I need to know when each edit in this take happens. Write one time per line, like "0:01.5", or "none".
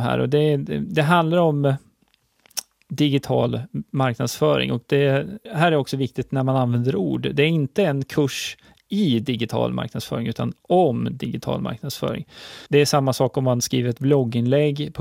0:05.4
0:12.7